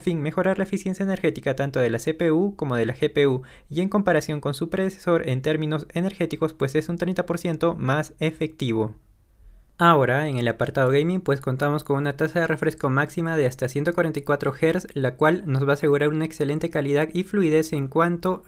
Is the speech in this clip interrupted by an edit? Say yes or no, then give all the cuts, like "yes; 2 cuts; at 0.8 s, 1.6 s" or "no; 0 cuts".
no; 0 cuts